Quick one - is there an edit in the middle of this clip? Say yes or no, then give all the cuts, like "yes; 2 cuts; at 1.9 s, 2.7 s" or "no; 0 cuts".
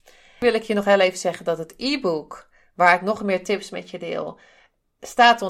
no; 0 cuts